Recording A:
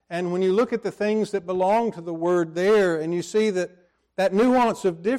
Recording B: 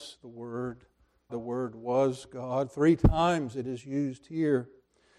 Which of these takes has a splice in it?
B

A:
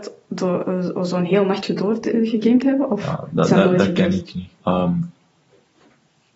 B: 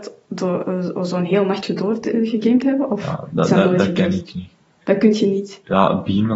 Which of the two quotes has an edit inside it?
A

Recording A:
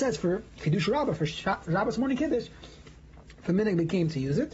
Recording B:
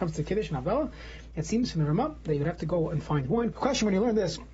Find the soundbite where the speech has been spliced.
B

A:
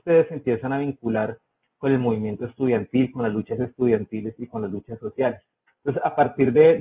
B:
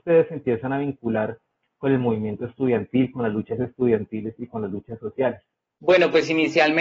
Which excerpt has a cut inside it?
A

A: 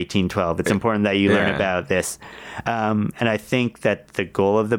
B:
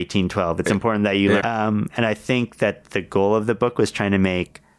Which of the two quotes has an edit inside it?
B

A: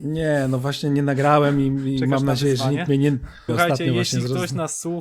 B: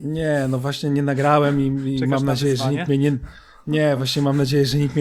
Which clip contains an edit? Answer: A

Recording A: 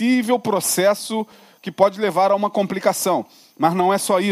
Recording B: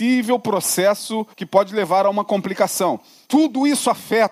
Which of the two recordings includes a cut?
B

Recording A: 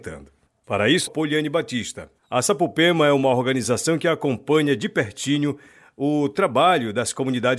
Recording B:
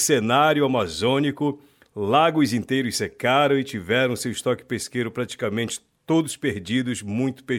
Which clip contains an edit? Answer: A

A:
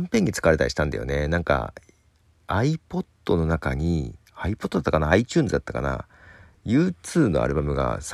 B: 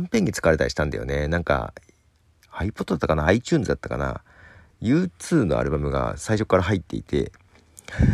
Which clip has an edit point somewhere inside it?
B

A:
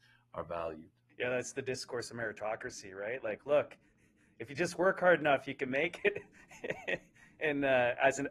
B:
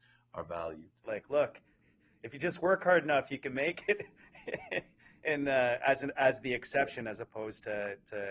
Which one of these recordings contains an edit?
B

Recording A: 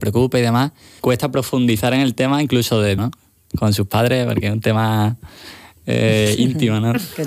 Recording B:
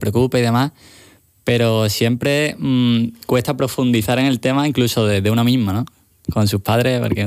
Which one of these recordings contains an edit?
A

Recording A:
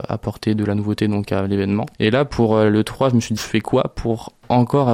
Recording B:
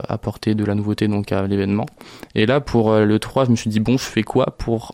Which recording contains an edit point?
A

